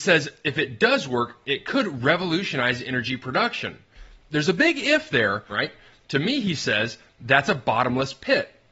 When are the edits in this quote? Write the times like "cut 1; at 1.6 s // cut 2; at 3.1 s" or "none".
cut 1; at 5.5 s